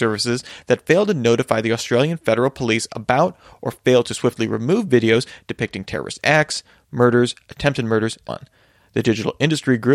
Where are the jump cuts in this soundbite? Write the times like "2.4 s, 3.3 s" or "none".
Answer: 8.3 s